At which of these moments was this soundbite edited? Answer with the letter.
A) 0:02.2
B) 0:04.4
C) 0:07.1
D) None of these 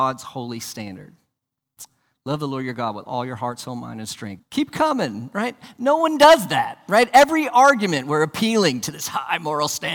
B